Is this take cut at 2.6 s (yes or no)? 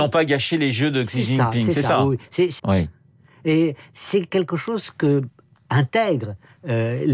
yes